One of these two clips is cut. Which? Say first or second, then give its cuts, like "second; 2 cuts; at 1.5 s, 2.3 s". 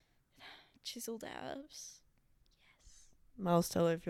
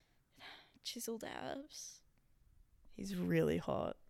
first; 1 cut; at 2.4 s